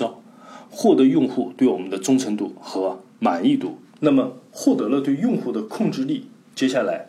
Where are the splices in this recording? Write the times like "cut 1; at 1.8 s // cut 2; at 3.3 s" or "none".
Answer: none